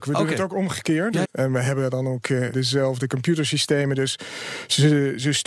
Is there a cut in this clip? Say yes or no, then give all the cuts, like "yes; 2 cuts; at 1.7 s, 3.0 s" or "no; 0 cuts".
yes; 2 cuts; at 1.2 s, 2.5 s